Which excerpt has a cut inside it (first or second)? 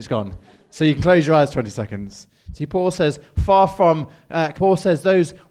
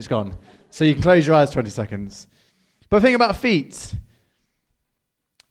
first